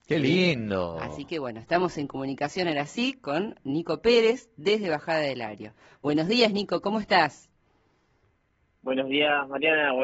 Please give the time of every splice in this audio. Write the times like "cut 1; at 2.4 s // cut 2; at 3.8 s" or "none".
none